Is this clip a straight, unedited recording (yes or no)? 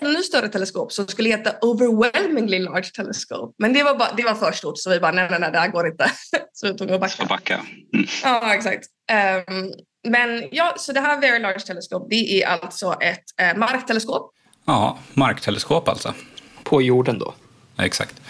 yes